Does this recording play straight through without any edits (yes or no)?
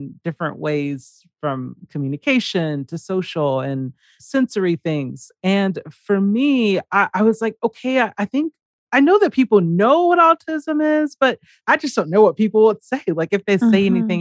yes